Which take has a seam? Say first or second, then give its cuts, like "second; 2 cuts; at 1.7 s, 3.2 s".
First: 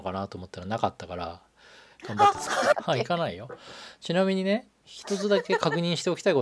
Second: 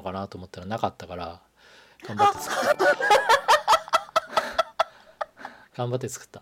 first; 1 cut; at 2.7 s